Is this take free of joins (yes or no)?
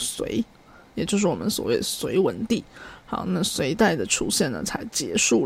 yes